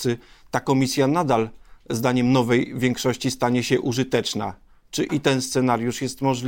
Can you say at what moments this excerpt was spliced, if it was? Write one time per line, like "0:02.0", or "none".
none